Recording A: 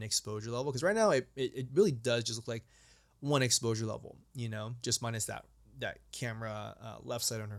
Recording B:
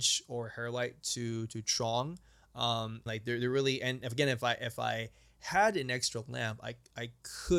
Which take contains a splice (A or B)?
B